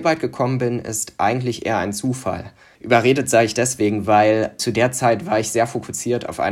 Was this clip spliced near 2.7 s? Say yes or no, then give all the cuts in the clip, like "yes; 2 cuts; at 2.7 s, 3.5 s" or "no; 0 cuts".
yes; 1 cut; at 2.7 s